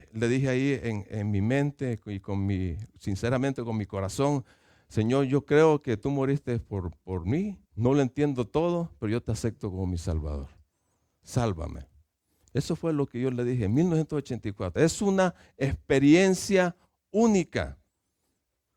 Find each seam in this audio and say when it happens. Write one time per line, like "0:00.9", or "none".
0:07.7
0:14.8